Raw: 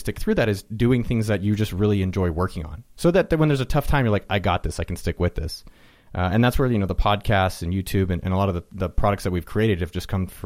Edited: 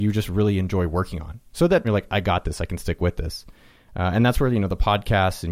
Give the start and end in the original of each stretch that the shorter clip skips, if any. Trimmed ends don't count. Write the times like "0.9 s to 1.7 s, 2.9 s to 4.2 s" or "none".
3.3 s to 4.0 s